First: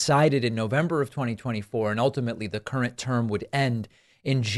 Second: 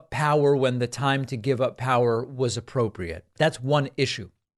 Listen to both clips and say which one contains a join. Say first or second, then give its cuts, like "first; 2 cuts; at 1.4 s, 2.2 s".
second; 1 cut; at 3.4 s